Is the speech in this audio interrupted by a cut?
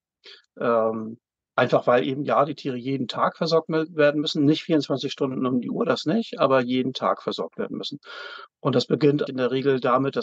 yes; 1 cut; at 9.3 s

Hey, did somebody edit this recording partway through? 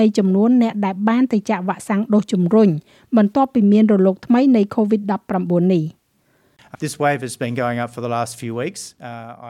yes; 1 cut; at 6.7 s

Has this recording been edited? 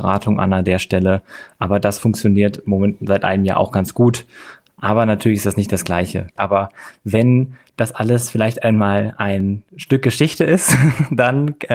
yes; 1 cut; at 6.4 s

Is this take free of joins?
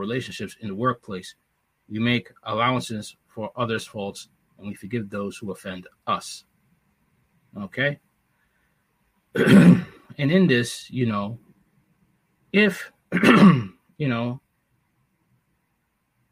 yes; 0 cuts

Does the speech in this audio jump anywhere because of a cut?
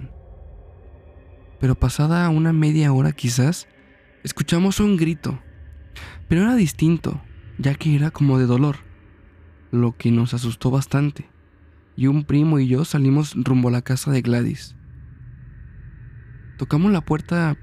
no; 0 cuts

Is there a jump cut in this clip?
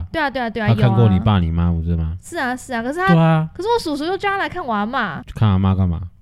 no; 0 cuts

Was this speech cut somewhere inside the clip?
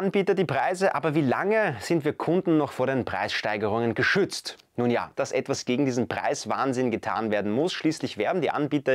yes; 1 cut; at 5.1 s

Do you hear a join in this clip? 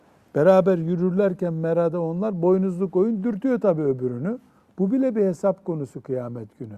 no; 0 cuts

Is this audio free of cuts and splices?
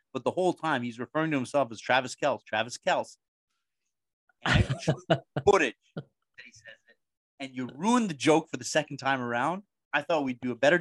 no; 1 cut; at 2.4 s

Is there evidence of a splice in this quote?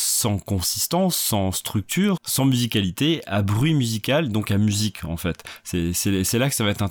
yes; 1 cut; at 2.2 s

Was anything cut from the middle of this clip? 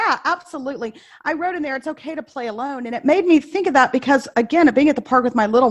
no; 0 cuts

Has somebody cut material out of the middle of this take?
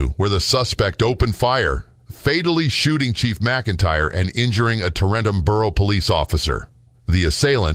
no; 0 cuts

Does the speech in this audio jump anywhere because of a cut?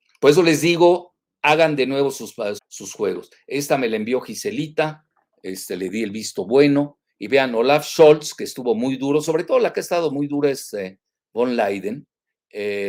yes; 1 cut; at 2.6 s

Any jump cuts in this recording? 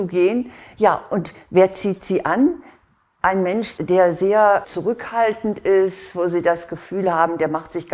no; 0 cuts

